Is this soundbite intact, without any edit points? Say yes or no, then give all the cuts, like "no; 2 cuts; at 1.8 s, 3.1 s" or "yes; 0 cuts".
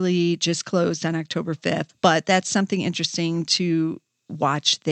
no; 1 cut; at 1.9 s